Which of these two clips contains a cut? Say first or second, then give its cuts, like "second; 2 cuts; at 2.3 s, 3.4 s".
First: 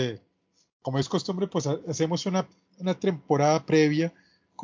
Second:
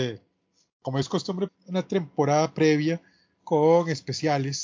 second; 1 cut; at 1.5 s